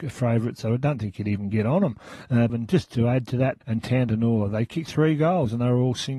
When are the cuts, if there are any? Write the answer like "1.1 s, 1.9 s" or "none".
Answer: 2.5 s, 3.6 s

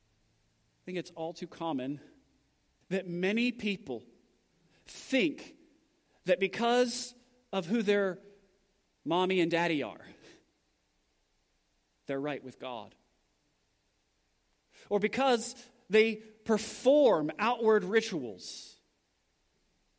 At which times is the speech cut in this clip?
2.8 s

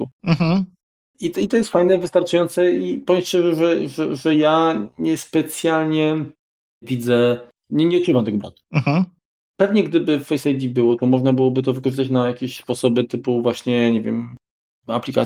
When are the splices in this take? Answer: none

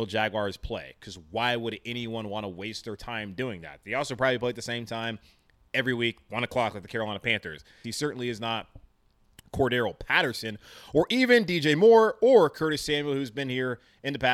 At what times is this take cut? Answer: 7.8 s

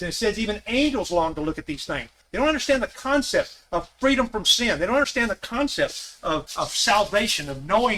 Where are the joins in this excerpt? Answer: 2.2 s, 6.5 s

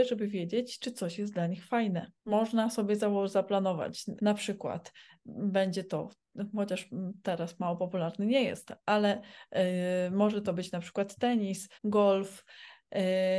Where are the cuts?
2.2 s, 4.2 s, 11.7 s

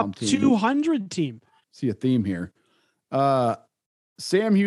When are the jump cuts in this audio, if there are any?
1.6 s

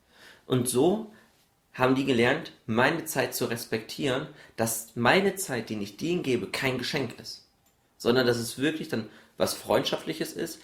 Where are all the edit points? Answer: none

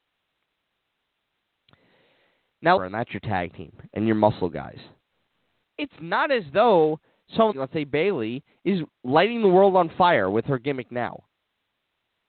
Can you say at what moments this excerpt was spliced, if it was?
2.8 s, 5.7 s, 7.5 s

